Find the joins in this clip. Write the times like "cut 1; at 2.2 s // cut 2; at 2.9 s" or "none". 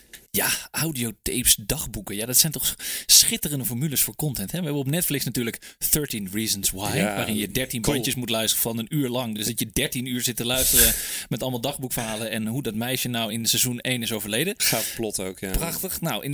none